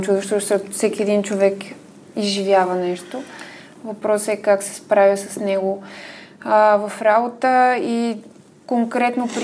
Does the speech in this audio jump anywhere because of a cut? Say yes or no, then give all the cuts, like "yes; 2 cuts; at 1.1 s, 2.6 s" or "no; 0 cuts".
no; 0 cuts